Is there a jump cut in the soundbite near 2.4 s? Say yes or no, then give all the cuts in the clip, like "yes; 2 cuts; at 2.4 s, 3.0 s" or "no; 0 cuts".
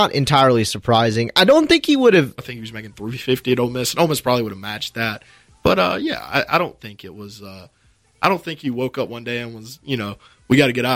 yes; 1 cut; at 2.4 s